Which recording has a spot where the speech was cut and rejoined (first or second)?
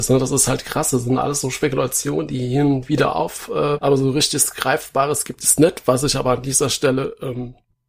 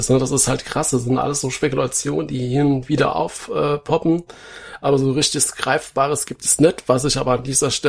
first